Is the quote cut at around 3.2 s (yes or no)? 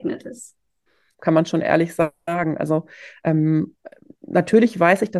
no